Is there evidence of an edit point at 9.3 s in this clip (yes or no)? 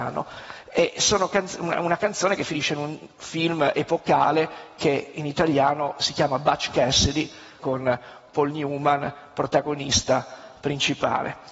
no